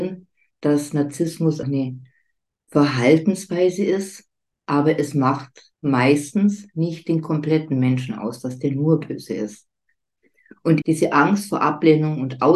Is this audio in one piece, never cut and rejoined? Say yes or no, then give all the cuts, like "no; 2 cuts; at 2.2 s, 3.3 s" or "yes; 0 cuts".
no; 3 cuts; at 1.6 s, 5.7 s, 10.8 s